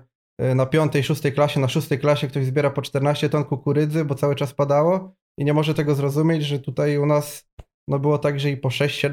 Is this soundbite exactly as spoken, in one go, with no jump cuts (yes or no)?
yes